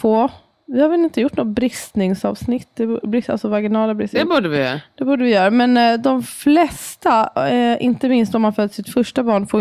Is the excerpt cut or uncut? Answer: uncut